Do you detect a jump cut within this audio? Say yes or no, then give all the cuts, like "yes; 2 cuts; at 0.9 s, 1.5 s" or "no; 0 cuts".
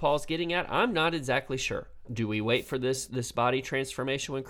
yes; 2 cuts; at 2.1 s, 3.1 s